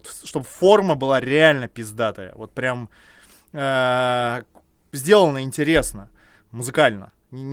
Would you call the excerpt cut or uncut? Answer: uncut